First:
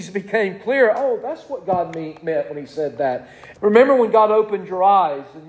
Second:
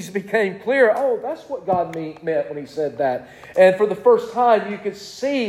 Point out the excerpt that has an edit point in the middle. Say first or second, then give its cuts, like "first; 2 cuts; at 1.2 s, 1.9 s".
first; 1 cut; at 3.5 s